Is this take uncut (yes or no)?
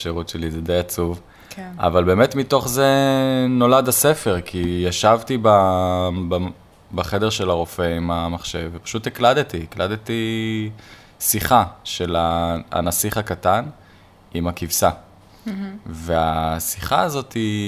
yes